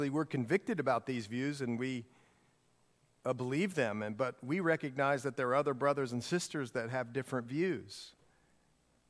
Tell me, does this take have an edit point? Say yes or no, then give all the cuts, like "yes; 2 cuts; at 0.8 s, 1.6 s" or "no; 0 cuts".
no; 0 cuts